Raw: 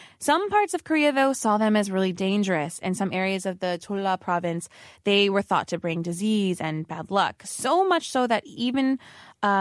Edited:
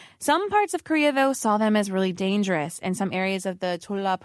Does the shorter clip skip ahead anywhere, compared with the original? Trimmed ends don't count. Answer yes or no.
no